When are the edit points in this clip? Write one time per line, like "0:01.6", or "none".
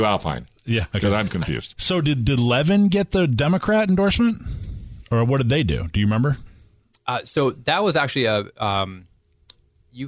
0:01.3